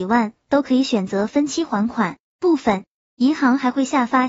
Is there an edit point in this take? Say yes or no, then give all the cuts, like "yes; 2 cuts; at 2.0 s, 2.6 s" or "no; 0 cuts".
yes; 1 cut; at 2.3 s